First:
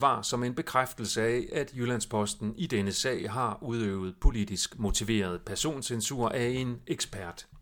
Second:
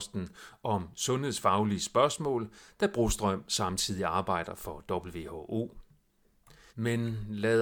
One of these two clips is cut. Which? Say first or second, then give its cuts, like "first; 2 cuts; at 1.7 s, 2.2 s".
second; 1 cut; at 6.7 s